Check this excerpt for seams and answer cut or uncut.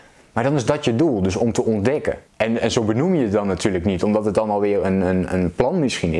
cut